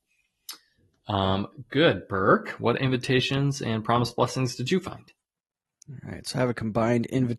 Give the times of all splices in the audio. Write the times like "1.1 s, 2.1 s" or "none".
none

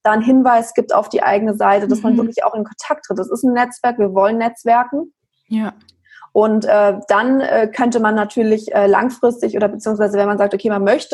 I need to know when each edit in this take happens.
none

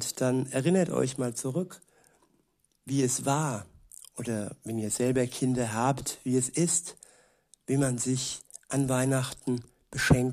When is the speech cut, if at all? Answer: none

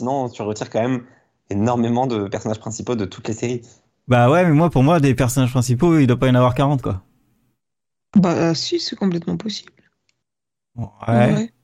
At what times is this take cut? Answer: none

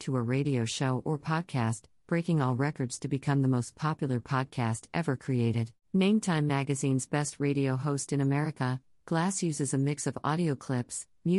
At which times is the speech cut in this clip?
5.8 s

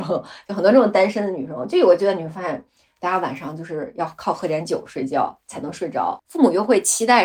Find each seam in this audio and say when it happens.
6.2 s

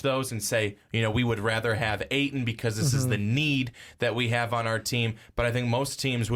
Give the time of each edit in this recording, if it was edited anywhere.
none

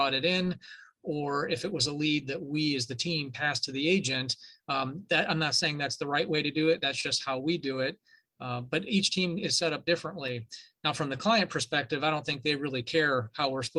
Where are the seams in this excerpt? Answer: none

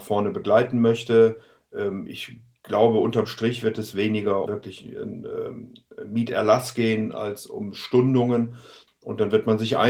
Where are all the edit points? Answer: 4.5 s, 8.9 s

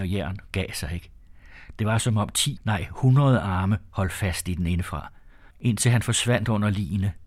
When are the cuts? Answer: 2.6 s, 5.5 s

